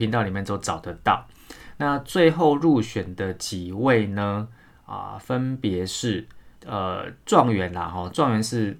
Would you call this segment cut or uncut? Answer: cut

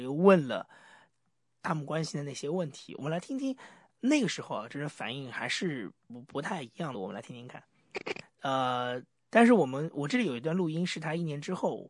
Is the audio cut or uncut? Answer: cut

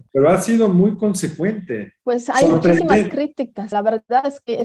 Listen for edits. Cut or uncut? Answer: cut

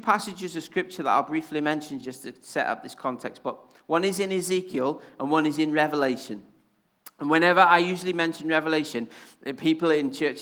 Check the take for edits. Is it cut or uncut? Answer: uncut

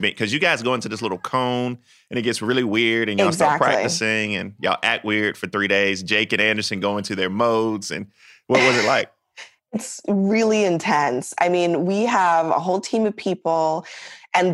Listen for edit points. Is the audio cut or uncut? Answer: uncut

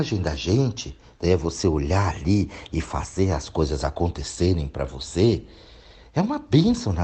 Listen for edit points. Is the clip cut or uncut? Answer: uncut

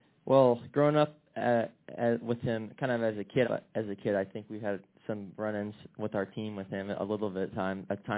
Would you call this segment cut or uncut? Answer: cut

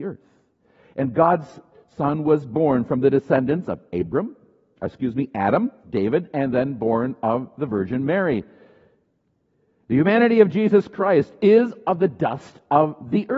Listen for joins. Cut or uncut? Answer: cut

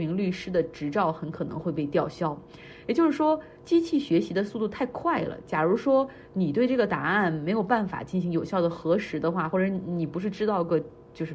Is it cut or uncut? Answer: uncut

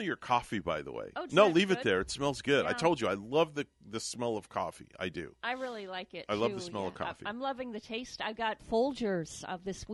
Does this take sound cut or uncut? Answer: cut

